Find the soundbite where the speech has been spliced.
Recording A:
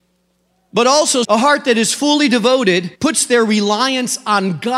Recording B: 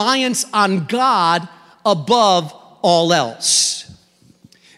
A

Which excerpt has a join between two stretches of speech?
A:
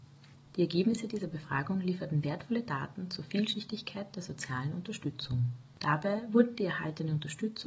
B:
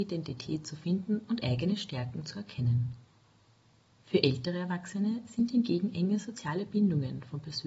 A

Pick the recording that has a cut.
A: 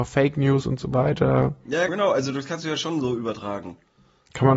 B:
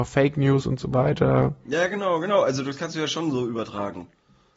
A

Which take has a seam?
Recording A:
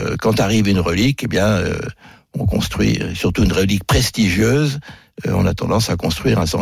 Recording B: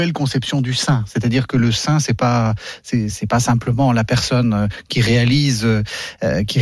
B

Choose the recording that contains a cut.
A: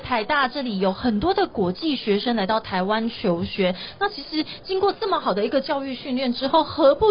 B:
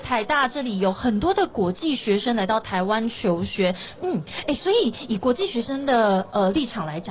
B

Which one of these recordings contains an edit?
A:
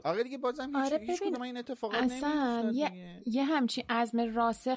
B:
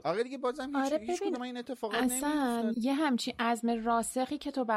B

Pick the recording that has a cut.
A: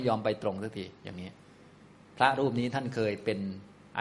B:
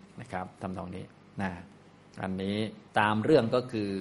B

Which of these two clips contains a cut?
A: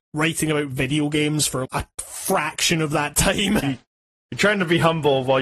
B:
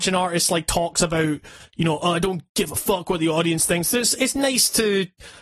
A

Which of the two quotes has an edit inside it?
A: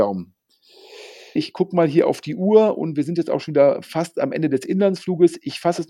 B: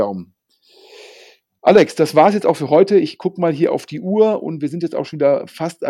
A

